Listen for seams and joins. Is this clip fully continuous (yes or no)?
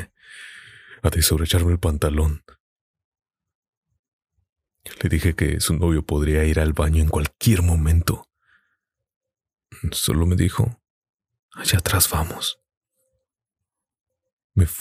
yes